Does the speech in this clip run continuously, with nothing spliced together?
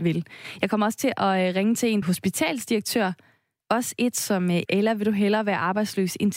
no; 3 cuts; at 2.0 s, 3.6 s, 4.7 s

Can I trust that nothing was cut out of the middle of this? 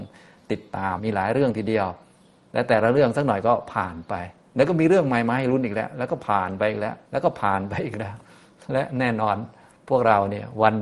no; 2 cuts; at 1.0 s, 7.0 s

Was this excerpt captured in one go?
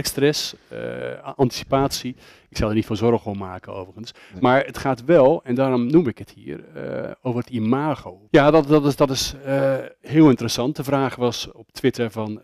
no; 1 cut; at 8.3 s

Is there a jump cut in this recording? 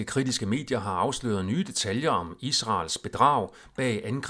no; 0 cuts

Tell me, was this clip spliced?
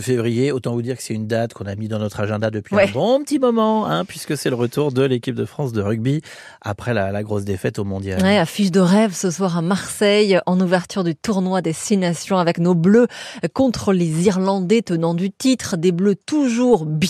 no; 0 cuts

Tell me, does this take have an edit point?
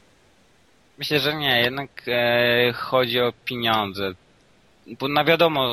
no; 0 cuts

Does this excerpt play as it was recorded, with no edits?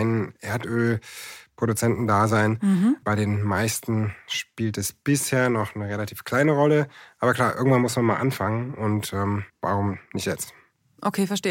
no; 2 cuts; at 3.0 s, 9.5 s

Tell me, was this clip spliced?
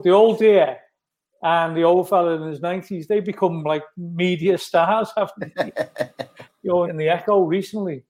yes; 1 cut; at 6.8 s

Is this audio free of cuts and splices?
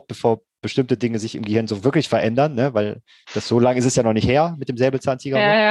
yes; 0 cuts

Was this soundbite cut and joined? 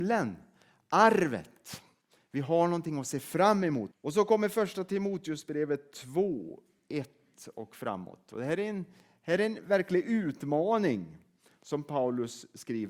yes; 1 cut; at 3.9 s

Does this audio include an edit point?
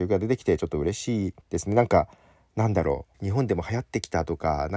yes; 2 cuts; at 1.4 s, 3.1 s

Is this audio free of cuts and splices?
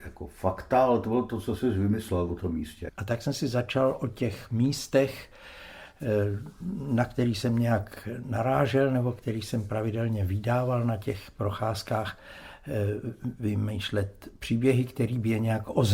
no; 1 cut; at 2.9 s

